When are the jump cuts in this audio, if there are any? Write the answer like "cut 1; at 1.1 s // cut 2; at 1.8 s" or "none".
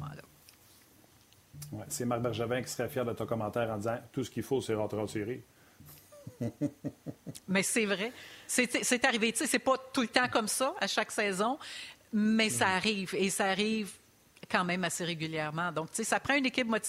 none